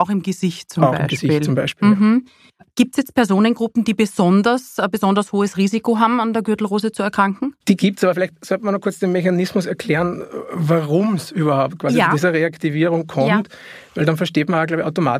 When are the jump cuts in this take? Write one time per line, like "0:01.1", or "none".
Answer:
0:07.6